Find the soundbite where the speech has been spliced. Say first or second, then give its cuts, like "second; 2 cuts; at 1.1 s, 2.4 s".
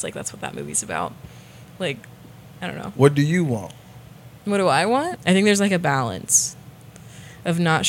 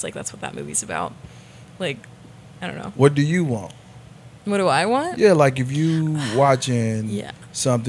first; 1 cut; at 5.2 s